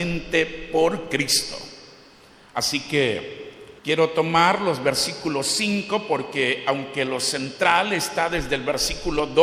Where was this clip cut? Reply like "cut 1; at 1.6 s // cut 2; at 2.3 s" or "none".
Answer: cut 1; at 3.8 s